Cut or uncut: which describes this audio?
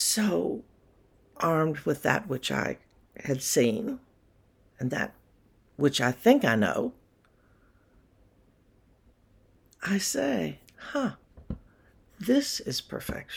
uncut